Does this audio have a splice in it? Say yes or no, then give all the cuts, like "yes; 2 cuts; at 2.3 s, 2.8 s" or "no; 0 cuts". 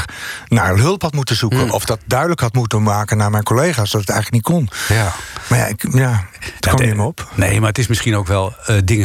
no; 0 cuts